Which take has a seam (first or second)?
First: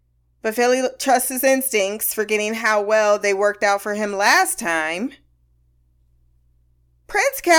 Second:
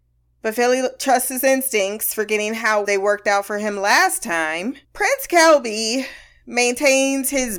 second